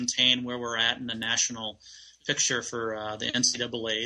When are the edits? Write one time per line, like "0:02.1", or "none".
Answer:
none

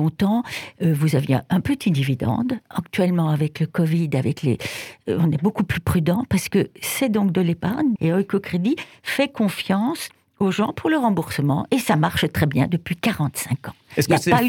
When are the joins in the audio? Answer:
0:08.0

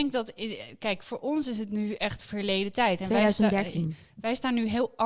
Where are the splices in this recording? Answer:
none

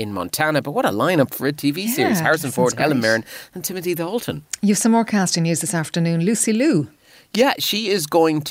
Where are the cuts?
none

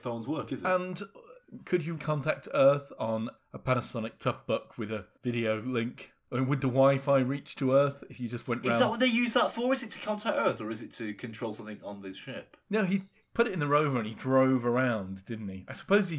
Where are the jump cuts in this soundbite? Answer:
0:02.0

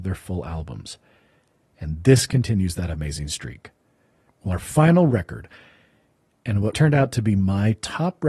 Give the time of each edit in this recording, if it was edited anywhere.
0:04.3
0:06.7

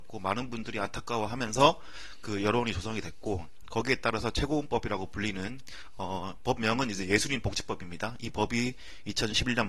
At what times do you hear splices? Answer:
none

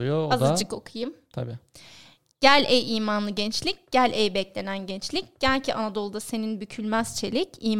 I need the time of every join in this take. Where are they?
none

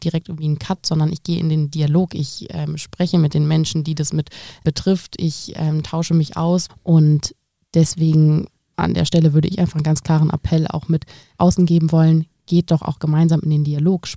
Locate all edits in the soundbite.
0:06.7

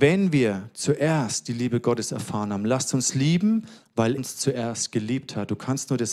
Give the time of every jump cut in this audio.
0:04.2

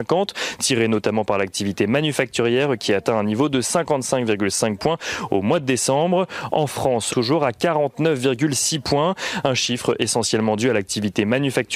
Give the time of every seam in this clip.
0:07.1

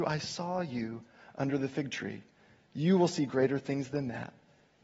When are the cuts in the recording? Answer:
none

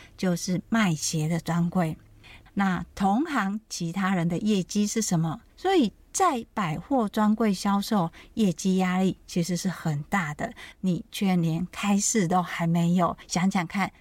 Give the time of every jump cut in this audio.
0:02.5
0:05.5
0:10.7

